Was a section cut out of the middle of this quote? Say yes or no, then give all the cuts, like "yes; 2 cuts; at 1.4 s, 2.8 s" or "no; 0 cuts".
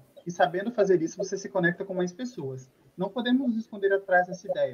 no; 0 cuts